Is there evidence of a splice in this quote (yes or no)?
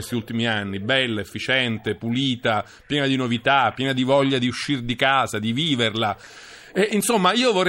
no